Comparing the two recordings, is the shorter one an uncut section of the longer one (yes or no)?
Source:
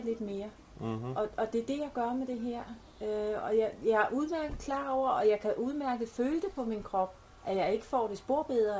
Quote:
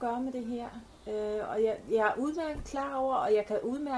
yes